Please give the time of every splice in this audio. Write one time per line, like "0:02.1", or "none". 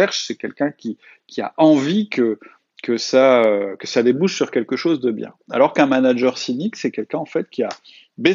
none